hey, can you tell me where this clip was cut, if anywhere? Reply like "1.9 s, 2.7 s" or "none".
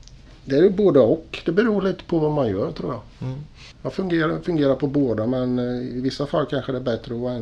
3.7 s

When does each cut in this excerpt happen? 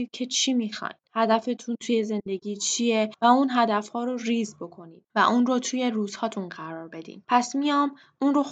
7.2 s

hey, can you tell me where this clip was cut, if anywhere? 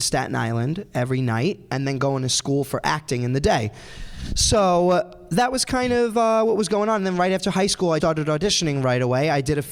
8.0 s

